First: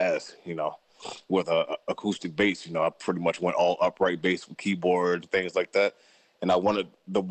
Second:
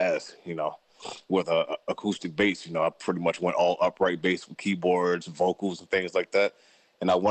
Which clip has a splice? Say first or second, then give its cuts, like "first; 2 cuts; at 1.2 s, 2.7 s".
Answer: first; 1 cut; at 5.2 s